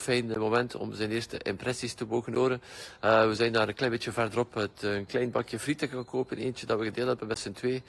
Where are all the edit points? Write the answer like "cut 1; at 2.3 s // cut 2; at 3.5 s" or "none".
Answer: none